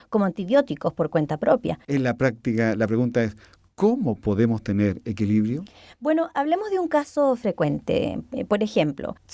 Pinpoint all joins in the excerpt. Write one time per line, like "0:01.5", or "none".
0:01.8